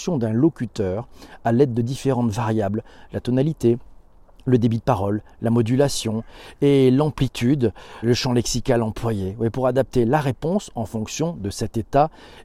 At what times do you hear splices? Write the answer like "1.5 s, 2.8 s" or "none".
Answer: 8.0 s

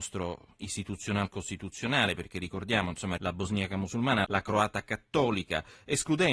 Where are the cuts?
3.2 s, 4.2 s

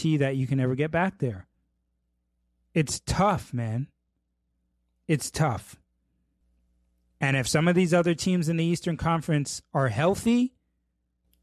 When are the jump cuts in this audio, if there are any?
none

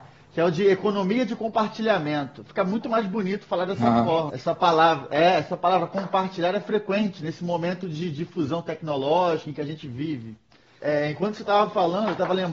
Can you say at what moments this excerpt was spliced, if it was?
4.3 s, 10.8 s

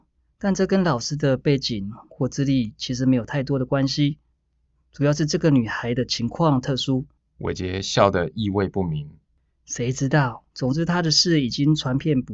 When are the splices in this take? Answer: 7.2 s, 10.5 s

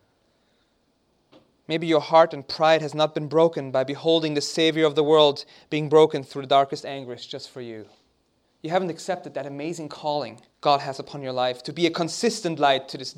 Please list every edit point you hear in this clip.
8.4 s, 10.5 s

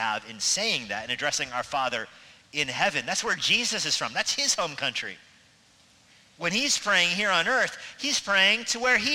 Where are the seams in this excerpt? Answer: none

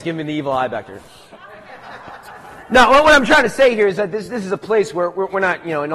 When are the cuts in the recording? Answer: none

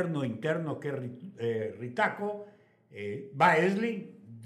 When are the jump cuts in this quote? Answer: none

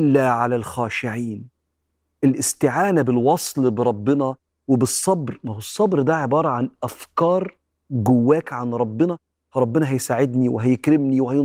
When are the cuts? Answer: none

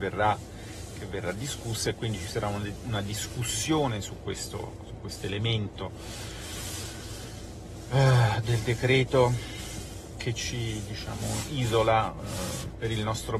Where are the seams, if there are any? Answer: none

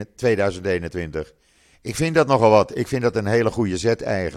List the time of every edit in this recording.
1.7 s

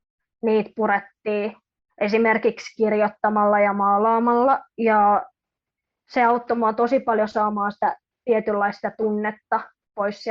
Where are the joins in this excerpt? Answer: none

